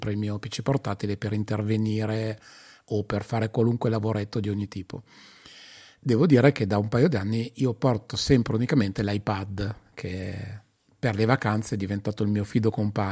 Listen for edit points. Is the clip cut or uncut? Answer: uncut